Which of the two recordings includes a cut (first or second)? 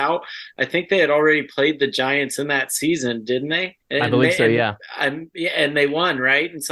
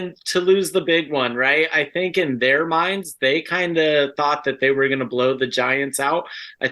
first